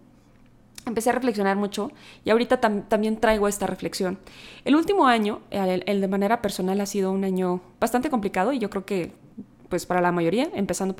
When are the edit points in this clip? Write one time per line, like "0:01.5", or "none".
none